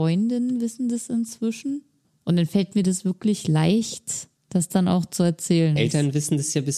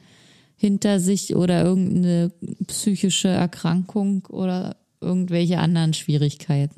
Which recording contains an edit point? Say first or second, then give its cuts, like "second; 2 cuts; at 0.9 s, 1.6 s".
first; 3 cuts; at 2.0 s, 4.4 s, 5.8 s